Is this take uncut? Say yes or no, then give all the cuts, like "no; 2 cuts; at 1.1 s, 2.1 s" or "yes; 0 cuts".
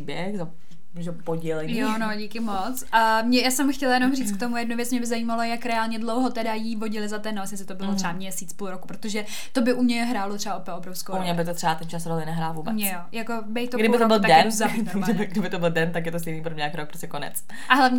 yes; 0 cuts